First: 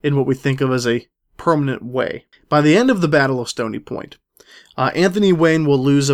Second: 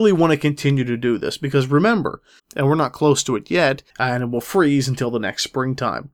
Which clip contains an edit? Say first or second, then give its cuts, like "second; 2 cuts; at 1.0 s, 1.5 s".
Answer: second; 2 cuts; at 2.4 s, 3.9 s